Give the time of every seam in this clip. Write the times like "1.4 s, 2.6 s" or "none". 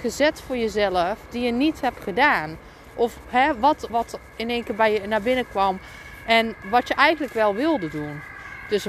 3.9 s, 6.6 s